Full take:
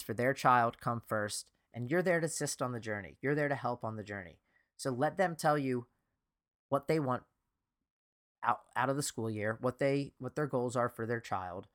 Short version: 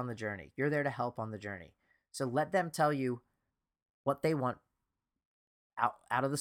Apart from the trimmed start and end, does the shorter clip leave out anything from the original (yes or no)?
no